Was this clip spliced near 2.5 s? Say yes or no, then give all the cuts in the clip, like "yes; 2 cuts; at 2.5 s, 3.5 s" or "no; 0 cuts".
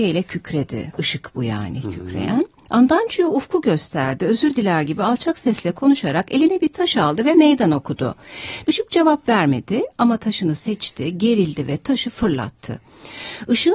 no; 1 cut; at 8.6 s